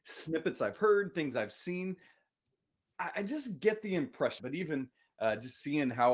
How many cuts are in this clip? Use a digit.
1